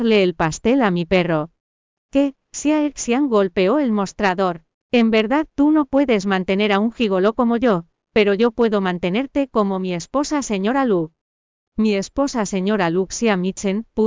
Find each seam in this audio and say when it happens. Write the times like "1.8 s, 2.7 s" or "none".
4.8 s